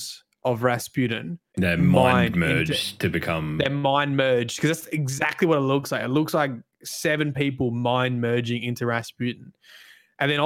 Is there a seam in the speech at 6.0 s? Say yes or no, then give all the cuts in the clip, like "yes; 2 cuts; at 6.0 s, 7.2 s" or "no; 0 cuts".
no; 1 cut; at 1.5 s